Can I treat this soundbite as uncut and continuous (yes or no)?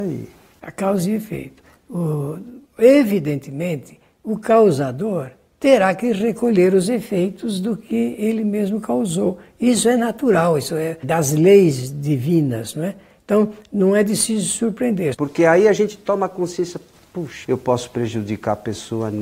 no